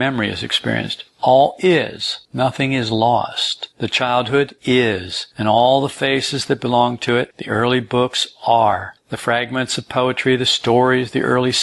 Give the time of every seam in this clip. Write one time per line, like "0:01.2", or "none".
0:03.7